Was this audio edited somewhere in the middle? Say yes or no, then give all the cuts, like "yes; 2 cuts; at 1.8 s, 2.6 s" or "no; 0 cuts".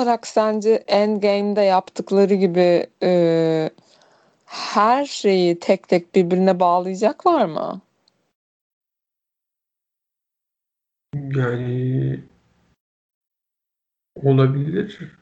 no; 0 cuts